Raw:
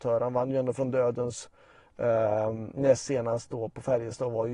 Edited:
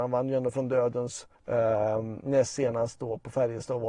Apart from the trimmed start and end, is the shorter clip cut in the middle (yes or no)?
yes